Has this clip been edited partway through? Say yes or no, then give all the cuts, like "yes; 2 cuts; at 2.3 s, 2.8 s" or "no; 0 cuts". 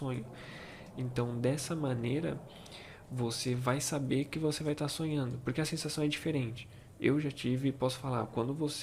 no; 0 cuts